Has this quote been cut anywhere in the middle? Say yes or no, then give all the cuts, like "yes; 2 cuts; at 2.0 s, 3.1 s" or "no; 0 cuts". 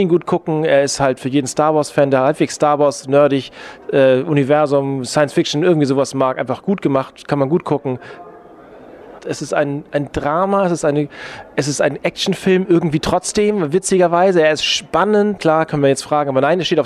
yes; 2 cuts; at 9.2 s, 15.4 s